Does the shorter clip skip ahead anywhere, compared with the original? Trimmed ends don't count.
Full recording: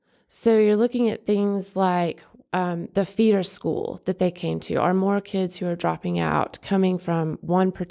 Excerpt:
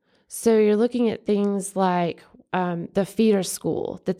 no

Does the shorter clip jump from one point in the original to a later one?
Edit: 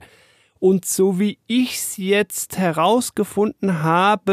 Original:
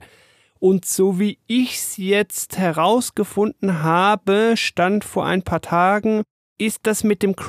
no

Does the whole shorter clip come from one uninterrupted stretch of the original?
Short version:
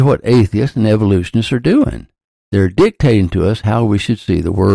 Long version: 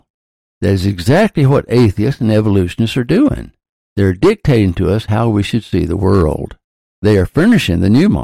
yes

